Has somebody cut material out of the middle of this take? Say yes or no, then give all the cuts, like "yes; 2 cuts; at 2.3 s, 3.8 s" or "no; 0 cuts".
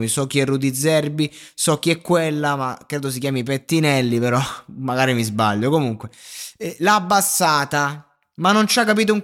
no; 0 cuts